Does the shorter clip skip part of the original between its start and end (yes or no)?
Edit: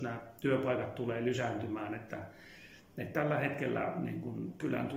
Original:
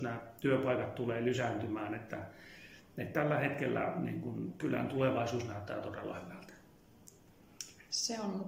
no